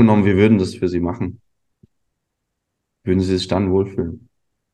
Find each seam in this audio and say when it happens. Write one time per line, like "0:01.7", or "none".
none